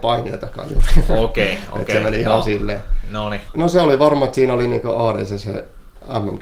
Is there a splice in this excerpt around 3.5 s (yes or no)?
yes